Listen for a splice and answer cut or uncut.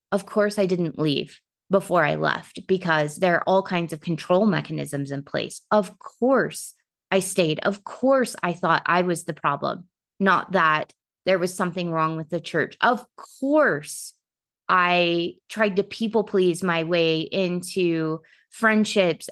uncut